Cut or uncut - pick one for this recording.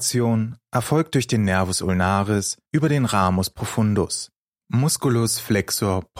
cut